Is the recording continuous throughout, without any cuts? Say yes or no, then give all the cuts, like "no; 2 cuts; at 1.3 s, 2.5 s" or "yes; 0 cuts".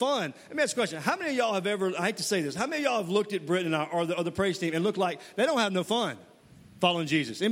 yes; 0 cuts